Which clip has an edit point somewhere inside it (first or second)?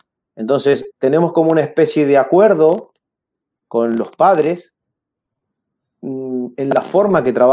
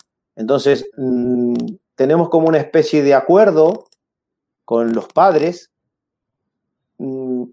first